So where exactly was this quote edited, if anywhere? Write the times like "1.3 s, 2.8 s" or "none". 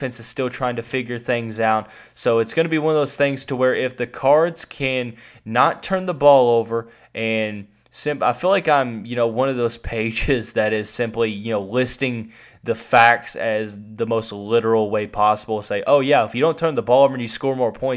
none